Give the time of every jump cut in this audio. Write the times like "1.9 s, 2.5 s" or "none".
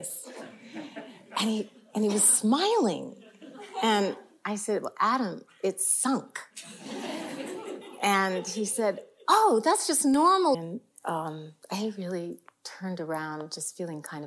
10.5 s